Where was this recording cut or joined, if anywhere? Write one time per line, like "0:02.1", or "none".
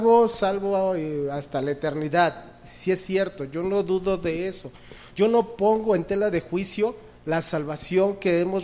0:05.1